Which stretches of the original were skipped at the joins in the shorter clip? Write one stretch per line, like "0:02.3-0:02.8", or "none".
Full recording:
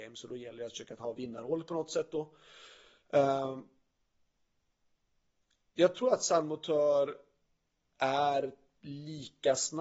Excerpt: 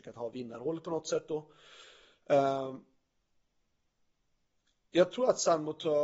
none